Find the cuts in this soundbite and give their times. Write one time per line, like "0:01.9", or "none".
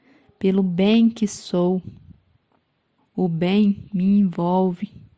0:03.0